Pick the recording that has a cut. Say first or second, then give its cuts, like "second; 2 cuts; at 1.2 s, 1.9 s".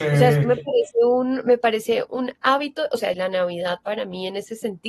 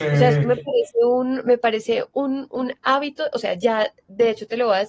first; 2 cuts; at 2.1 s, 3.1 s